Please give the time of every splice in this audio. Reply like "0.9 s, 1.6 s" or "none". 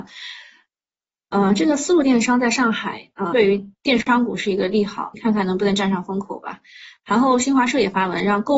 3.3 s, 5.1 s